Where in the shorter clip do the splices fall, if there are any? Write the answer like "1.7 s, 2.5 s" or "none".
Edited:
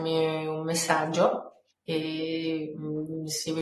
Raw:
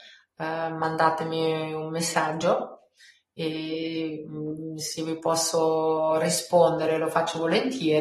1.7 s